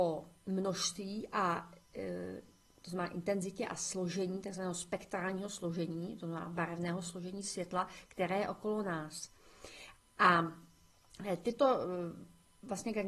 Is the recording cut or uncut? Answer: uncut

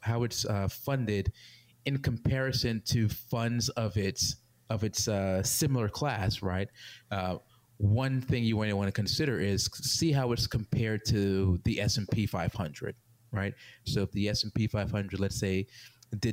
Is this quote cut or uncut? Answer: cut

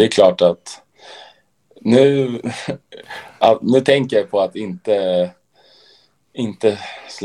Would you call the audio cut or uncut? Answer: uncut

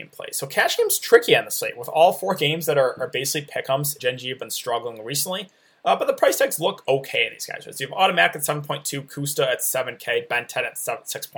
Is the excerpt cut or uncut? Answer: cut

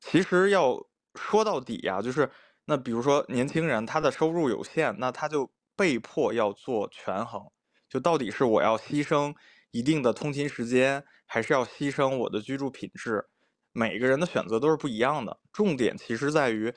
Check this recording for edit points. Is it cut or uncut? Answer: uncut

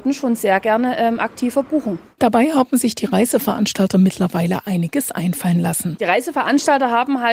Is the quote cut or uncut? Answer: uncut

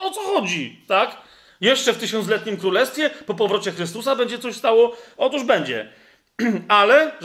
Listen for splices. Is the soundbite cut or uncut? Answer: uncut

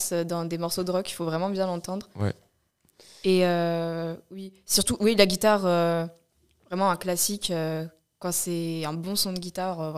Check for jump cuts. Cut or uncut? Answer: uncut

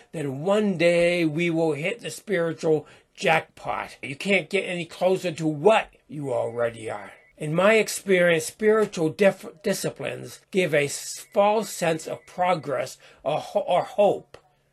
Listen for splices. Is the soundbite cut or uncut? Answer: cut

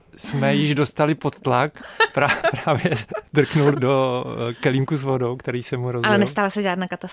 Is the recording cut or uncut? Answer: cut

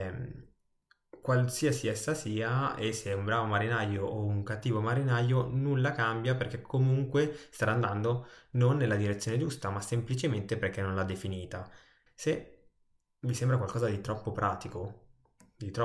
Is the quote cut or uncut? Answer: cut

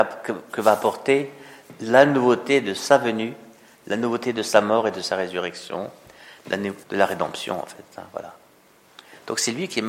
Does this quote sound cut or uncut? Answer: cut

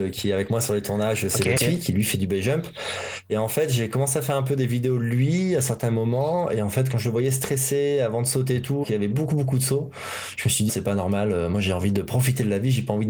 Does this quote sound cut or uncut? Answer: cut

